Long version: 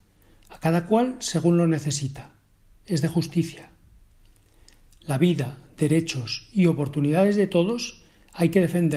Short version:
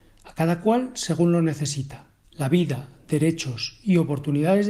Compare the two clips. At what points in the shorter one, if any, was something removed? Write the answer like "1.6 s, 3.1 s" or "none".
2.2 s

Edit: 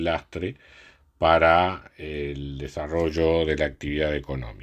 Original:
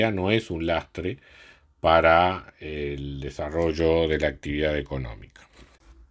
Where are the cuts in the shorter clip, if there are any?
none

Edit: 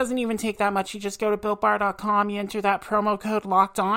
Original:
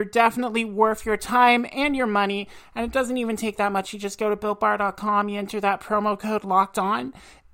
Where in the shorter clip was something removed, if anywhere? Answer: none

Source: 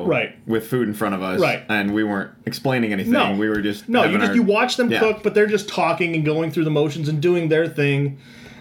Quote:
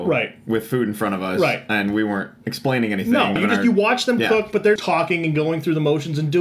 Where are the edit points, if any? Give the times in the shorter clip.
3.4 s, 4.8 s

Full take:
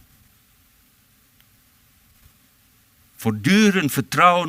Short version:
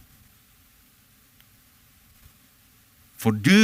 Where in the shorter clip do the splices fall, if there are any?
none

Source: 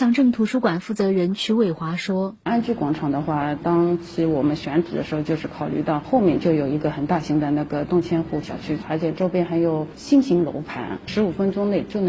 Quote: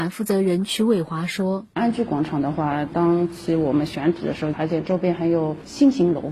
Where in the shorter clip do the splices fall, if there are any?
4.5 s

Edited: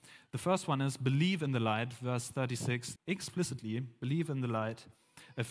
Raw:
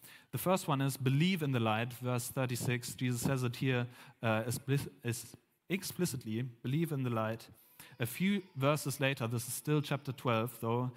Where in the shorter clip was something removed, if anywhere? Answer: 3.0 s

